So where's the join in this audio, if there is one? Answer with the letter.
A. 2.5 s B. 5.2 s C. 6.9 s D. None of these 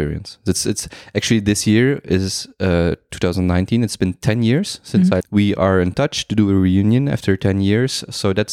B